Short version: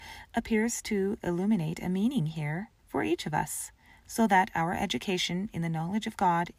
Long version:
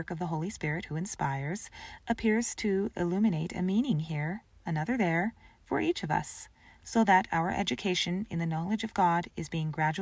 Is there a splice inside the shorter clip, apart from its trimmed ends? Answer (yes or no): yes